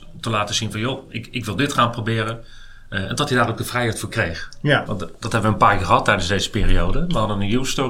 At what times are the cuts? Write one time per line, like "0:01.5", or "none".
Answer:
0:04.9